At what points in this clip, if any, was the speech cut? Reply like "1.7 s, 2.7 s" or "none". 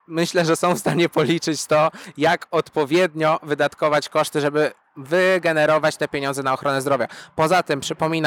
none